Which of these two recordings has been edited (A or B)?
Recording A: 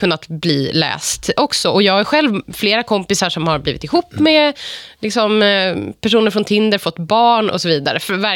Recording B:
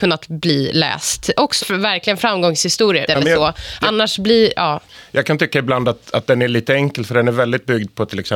B